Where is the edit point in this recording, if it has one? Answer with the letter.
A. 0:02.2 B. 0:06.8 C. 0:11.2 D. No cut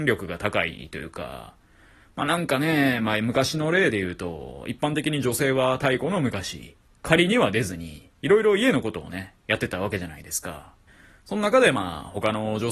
D